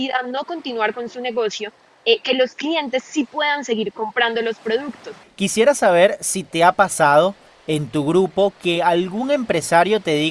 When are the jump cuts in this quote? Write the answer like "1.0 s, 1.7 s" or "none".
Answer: 5.2 s